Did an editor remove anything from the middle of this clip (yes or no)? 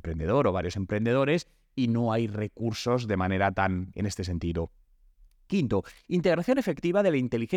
yes